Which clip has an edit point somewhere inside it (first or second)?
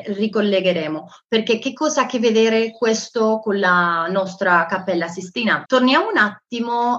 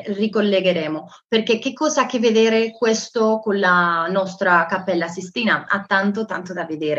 first